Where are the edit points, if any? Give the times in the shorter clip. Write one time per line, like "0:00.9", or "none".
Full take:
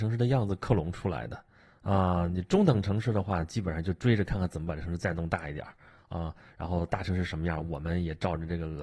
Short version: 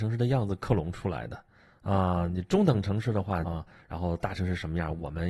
0:03.4